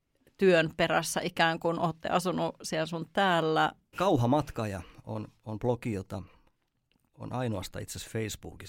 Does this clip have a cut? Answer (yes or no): yes